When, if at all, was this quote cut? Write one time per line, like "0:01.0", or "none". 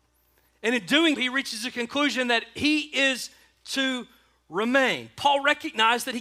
0:01.2